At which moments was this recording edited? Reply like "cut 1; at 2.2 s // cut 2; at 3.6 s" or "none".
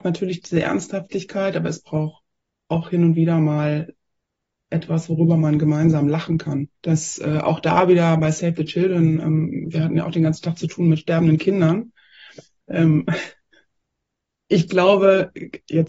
cut 1; at 6.7 s // cut 2; at 12.6 s